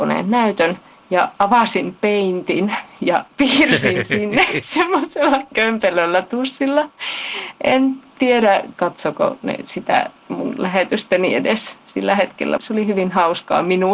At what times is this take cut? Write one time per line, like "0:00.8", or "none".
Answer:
0:08.7
0:12.6